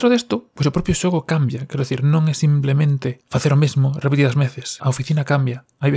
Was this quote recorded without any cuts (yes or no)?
no